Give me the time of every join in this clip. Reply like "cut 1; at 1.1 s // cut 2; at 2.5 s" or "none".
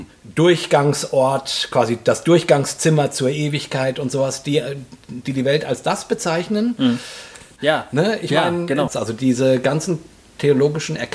cut 1; at 7.6 s // cut 2; at 8.9 s